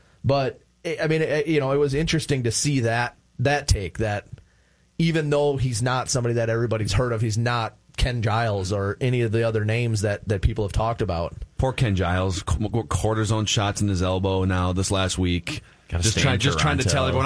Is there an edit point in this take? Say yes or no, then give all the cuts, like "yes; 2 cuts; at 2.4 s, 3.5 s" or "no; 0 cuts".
no; 0 cuts